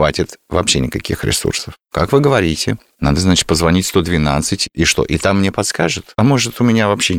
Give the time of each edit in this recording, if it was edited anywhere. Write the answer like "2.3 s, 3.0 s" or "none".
none